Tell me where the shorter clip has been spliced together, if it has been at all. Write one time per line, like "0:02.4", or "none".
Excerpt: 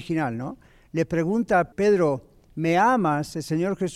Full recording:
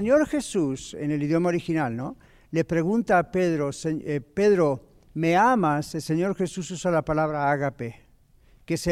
0:01.7

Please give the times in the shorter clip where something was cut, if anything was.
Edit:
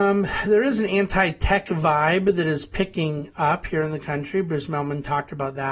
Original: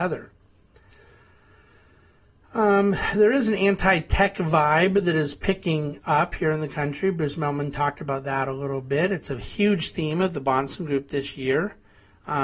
none

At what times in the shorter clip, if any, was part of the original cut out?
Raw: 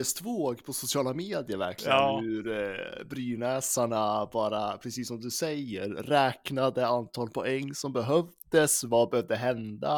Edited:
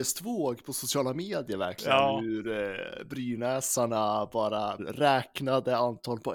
0:04.8

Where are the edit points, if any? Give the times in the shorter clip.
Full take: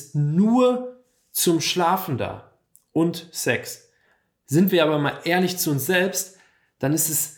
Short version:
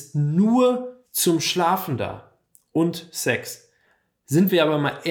0:01.1

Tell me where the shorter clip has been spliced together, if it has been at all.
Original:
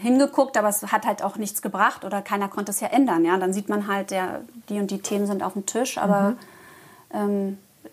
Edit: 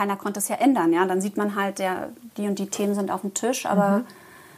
none

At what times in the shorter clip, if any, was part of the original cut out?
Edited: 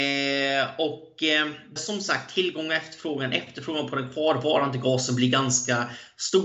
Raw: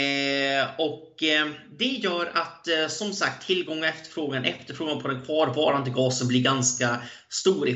0:01.8

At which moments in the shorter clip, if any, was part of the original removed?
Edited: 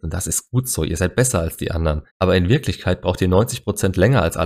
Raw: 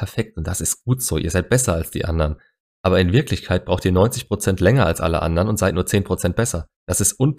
0:02.1

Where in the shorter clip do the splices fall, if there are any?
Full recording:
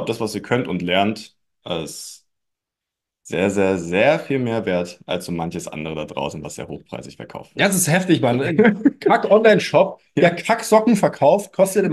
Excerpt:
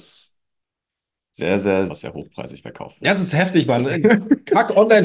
0:01.9

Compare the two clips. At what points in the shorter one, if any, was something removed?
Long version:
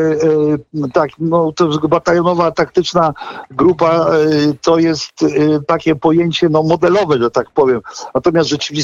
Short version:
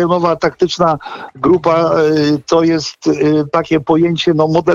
none

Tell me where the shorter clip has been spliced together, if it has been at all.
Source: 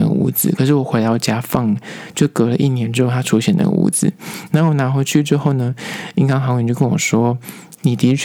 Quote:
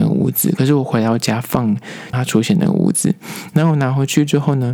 0:02.1

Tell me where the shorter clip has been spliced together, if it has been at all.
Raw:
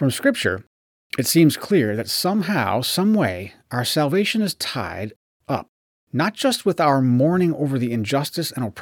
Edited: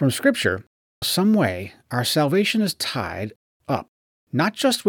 0:01.0

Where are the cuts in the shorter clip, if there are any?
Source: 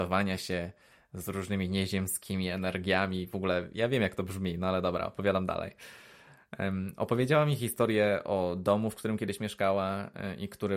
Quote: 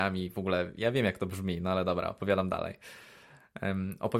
none

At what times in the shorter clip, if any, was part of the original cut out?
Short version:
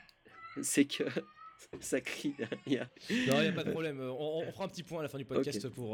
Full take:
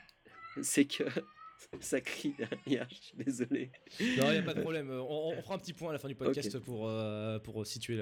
0:02.9

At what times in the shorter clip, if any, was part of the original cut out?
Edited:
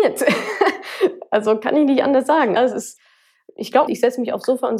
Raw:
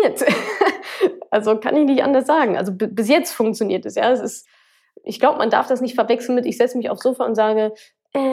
0:02.6
0:03.9

